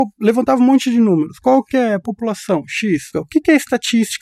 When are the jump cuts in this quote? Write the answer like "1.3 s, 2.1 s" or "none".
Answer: 3.1 s

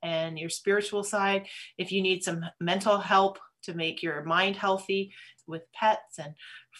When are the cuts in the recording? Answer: 5.4 s

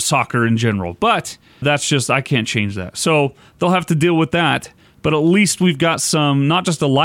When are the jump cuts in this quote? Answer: 1.6 s

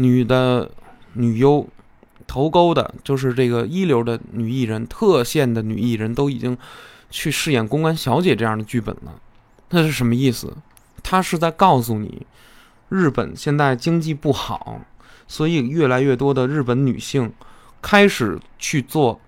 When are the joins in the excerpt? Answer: none

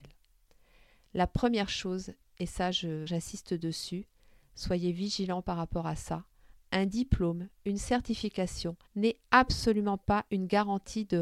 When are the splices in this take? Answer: 3.1 s, 8.9 s

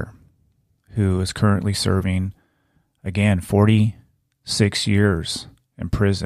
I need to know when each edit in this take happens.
none

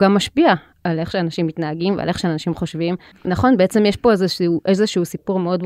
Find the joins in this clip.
3.1 s

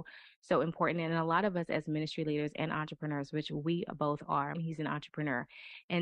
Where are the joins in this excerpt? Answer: 4.5 s

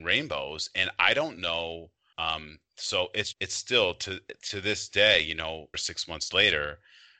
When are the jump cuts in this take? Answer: 2.1 s, 3.3 s, 5.7 s

